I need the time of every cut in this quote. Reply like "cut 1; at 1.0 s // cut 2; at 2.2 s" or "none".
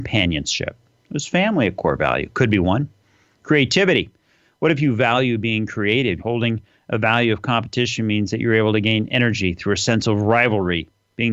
cut 1; at 6.2 s